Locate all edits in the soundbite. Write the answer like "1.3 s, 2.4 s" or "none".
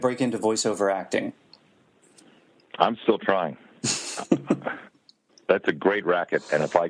none